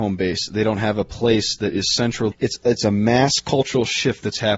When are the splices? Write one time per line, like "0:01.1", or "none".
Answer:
0:02.3